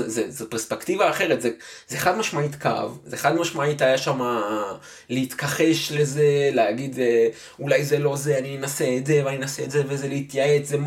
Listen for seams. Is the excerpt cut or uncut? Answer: uncut